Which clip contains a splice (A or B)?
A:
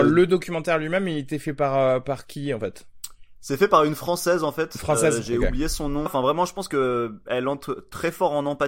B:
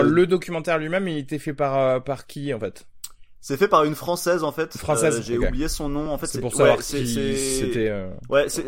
A